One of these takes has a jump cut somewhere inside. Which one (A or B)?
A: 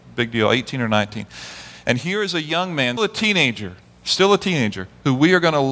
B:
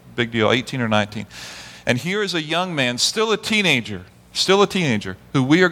A